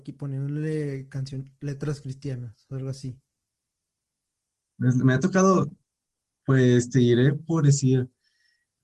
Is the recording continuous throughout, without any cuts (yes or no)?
yes